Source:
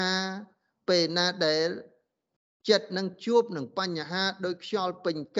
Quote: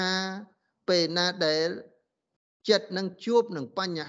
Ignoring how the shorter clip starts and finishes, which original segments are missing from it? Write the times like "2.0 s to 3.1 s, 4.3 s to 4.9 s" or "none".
none